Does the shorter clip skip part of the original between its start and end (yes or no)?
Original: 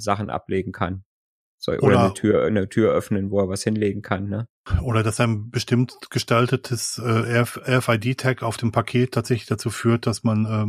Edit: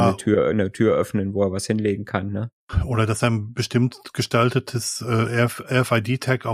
no